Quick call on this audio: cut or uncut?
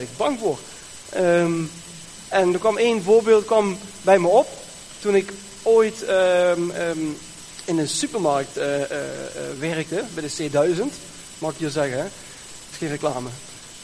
uncut